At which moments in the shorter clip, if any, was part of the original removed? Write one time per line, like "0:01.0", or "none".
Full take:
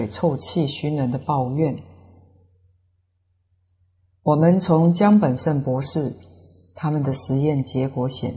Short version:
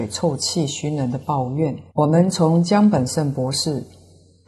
0:01.9